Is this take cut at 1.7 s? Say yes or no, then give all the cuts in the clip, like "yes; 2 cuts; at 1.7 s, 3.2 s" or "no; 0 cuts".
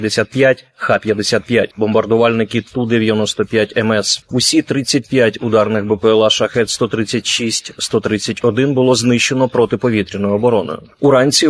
yes; 2 cuts; at 1.7 s, 4.2 s